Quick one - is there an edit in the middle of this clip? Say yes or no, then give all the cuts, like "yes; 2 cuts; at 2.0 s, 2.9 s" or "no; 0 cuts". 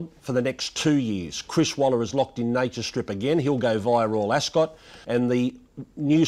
yes; 1 cut; at 5.0 s